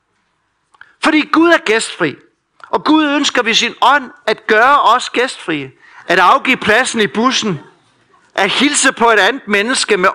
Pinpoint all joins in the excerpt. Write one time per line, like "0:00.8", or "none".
0:05.9